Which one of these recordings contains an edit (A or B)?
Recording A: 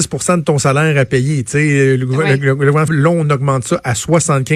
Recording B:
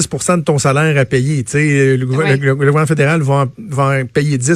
A